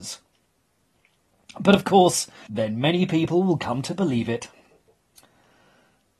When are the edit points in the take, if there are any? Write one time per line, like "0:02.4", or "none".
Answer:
0:02.5